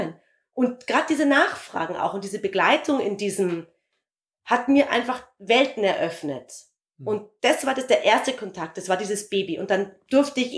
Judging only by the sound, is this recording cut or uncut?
uncut